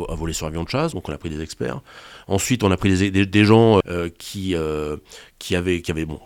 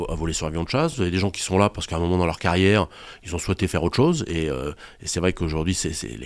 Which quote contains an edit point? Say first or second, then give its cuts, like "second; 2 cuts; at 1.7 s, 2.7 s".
first; 2 cuts; at 0.9 s, 3.8 s